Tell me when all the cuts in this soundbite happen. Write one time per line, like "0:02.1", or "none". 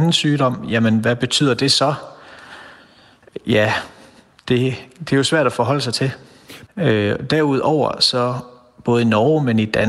0:06.7